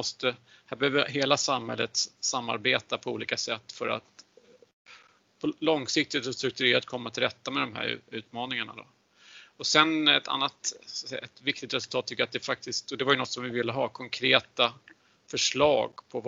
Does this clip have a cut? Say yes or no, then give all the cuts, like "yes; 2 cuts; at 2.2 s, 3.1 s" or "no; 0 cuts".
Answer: no; 0 cuts